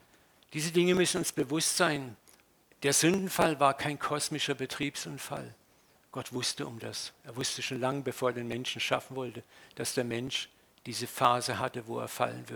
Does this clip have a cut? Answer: no; 0 cuts

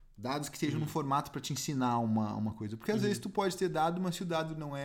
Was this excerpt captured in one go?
yes; 0 cuts

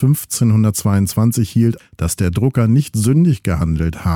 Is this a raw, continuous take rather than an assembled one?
no; 1 cut; at 1.8 s

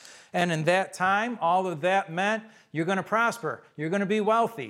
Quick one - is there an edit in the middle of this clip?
no; 0 cuts

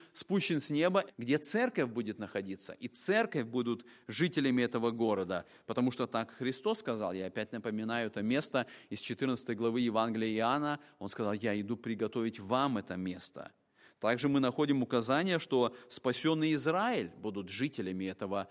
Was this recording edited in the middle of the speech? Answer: yes; 1 cut; at 1.1 s

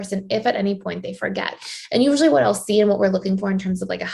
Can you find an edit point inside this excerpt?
no; 0 cuts

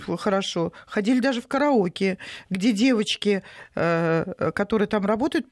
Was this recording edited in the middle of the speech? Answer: no; 0 cuts

